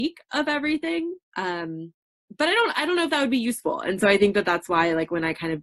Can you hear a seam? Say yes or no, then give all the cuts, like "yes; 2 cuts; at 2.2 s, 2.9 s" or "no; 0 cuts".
no; 0 cuts